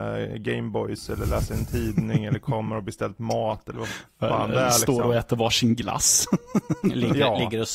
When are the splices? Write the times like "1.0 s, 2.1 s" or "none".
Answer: none